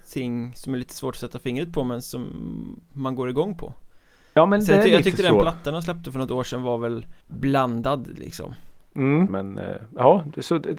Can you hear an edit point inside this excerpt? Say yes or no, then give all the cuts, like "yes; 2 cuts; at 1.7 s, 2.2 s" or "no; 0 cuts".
yes; 2 cuts; at 7.2 s, 9.3 s